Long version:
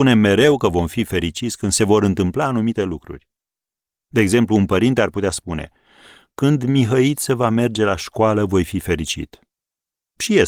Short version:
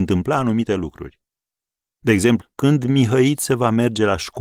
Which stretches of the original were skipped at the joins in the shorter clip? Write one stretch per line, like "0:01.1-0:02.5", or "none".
0:04.5-0:06.2